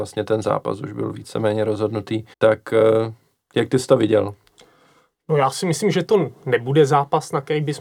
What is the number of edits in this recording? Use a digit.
1